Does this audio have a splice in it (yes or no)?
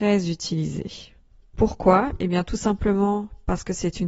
no